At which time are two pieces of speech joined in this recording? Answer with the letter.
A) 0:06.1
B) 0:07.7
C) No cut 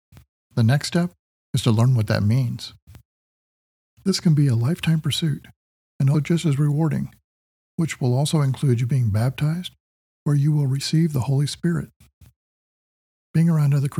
A